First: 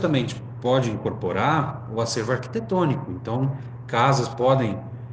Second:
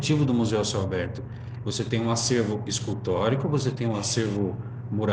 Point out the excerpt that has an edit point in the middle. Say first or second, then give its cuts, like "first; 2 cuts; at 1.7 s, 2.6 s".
second; 1 cut; at 1.6 s